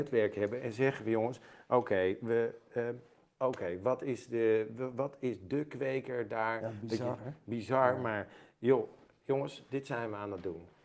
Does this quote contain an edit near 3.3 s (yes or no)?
yes